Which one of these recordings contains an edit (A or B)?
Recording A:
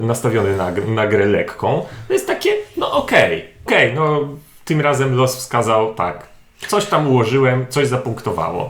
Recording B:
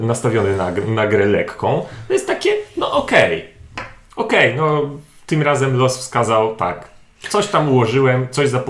A